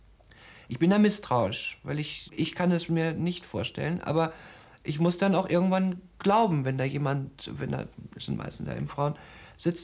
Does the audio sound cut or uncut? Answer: cut